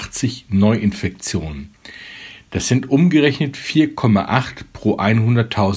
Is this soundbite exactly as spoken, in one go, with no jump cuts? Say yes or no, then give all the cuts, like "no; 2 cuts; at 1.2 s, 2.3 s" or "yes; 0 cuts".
yes; 0 cuts